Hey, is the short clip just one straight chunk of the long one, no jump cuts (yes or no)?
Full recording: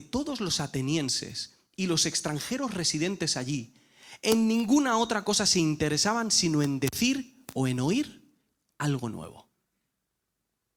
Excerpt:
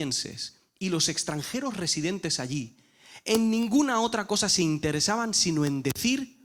yes